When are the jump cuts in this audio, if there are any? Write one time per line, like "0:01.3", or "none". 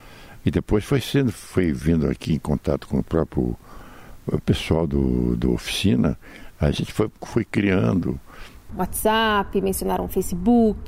0:01.3
0:07.2
0:08.7